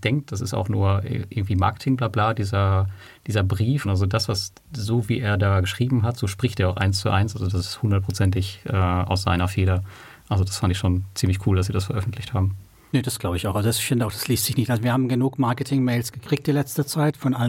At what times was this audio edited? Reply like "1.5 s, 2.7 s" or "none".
3.8 s